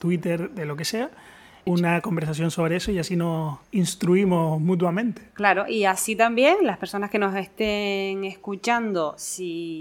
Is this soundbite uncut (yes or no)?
no